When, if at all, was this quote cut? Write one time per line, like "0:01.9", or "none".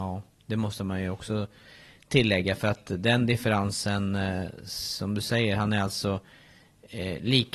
none

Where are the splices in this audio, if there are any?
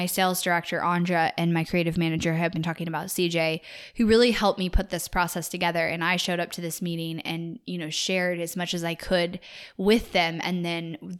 none

